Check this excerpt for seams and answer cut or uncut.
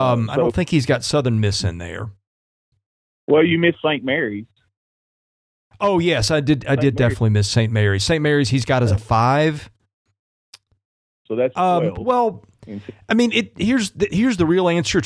uncut